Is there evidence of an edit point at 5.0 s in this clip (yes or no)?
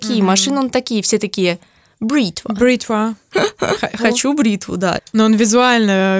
yes